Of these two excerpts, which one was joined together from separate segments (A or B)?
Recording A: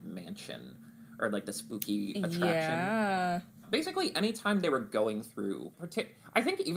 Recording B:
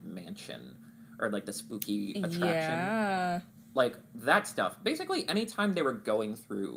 A